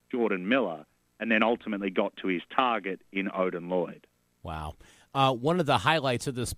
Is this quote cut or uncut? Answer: uncut